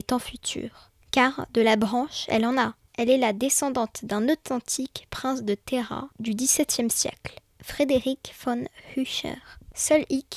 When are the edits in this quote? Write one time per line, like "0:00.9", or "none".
none